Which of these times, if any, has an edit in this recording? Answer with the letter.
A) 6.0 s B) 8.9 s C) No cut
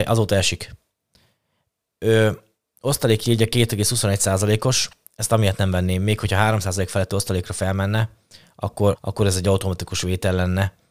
B